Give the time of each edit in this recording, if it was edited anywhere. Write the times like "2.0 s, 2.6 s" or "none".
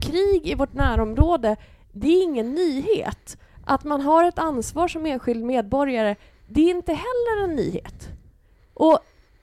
none